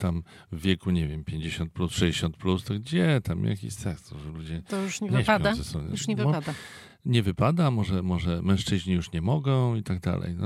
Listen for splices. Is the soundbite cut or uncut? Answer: uncut